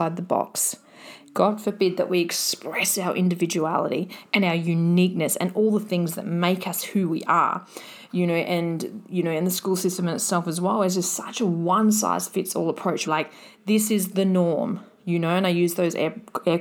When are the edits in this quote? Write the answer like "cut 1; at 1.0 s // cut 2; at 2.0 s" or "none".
cut 1; at 13.0 s